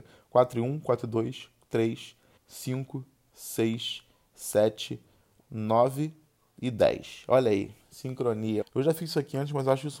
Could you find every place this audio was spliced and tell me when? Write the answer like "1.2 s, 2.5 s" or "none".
2.4 s, 5.4 s, 8.6 s

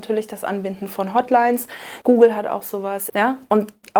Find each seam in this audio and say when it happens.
2.0 s, 3.1 s

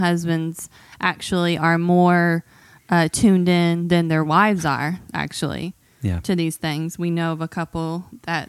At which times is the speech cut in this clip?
none

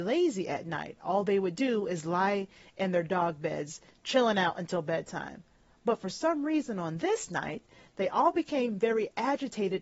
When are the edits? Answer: none

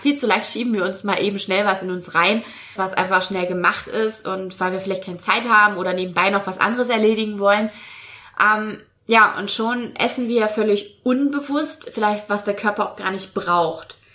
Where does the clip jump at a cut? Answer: 2.8 s

